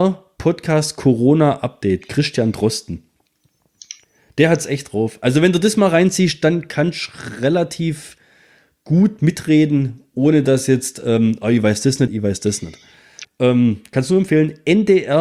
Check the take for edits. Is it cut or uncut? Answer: cut